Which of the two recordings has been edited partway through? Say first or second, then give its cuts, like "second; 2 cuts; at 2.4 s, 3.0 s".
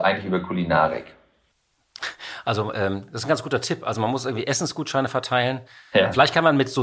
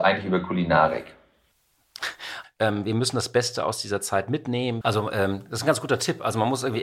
second; 2 cuts; at 2.4 s, 4.8 s